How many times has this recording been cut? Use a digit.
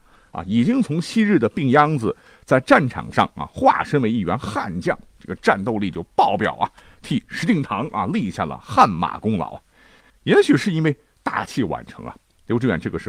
1